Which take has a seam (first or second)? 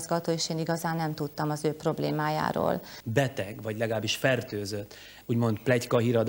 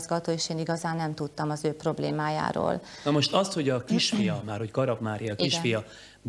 first